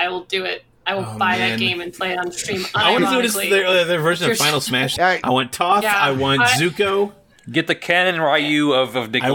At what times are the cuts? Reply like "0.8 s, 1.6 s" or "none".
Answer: 5.0 s